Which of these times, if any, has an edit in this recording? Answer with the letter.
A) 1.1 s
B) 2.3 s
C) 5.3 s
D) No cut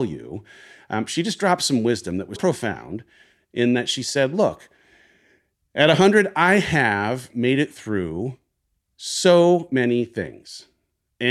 B